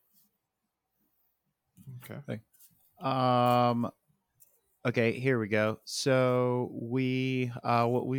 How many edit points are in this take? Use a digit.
0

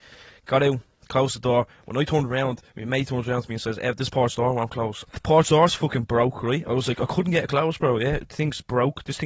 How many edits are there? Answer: 1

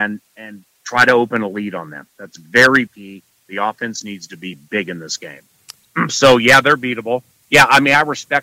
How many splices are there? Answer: 3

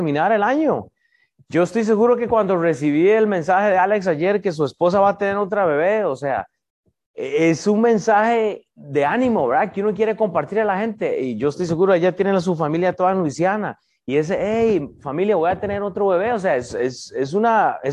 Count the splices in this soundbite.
1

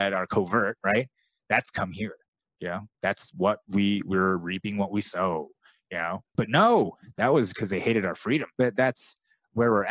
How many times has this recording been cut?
2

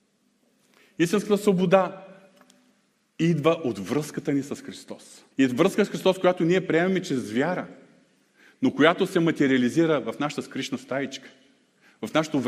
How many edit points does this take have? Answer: 1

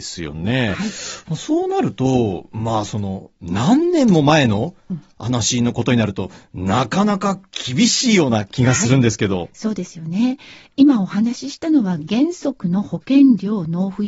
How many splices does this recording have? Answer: 0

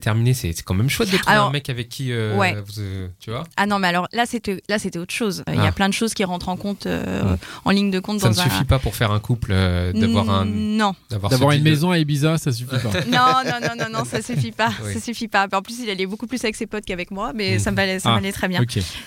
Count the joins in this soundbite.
1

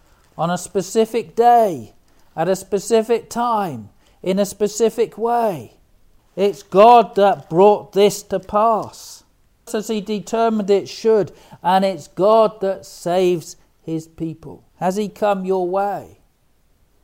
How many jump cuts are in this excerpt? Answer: 3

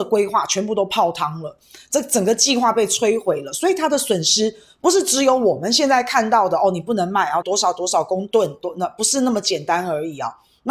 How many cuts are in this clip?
1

